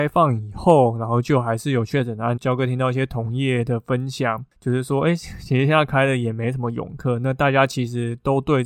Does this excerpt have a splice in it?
yes; 1 cut; at 2.4 s

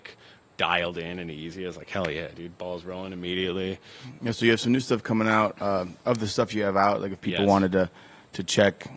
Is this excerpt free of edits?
yes; 0 cuts

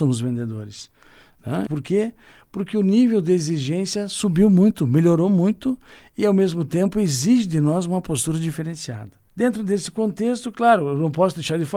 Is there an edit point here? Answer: yes; 1 cut; at 1.7 s

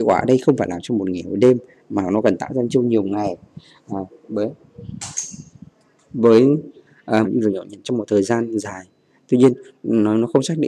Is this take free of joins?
no; 1 cut; at 7.2 s

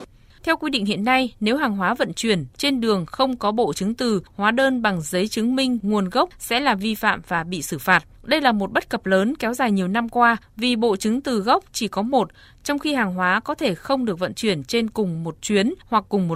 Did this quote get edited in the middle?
no; 0 cuts

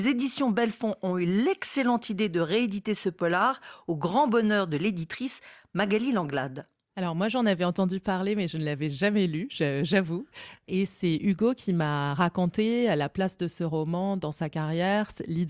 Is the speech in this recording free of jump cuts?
yes; 0 cuts

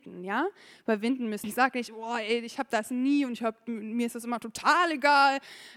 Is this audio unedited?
no; 1 cut; at 1.4 s

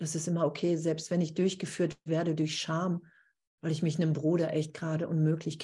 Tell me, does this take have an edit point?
yes; 1 cut; at 3.6 s

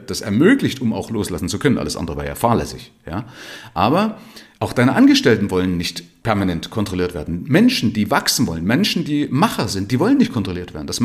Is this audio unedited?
no; 1 cut; at 4.6 s

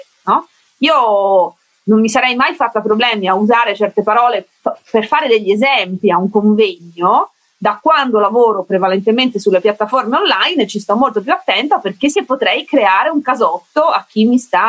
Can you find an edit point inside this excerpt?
yes; 2 cuts; at 4.6 s, 12.1 s

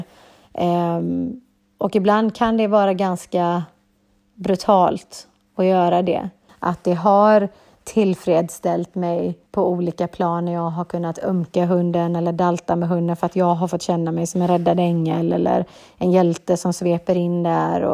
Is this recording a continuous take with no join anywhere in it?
no; 2 cuts; at 6.5 s, 9.5 s

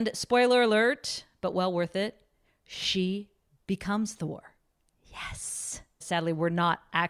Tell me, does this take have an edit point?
yes; 1 cut; at 6.0 s

